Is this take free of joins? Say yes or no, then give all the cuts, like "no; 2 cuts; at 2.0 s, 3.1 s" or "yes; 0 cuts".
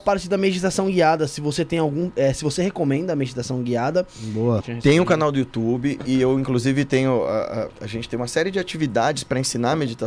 no; 2 cuts; at 4.6 s, 7.7 s